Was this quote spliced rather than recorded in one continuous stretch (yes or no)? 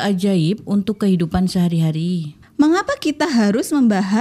no